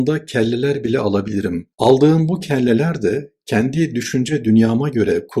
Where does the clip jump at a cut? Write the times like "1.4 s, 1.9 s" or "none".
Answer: 1.7 s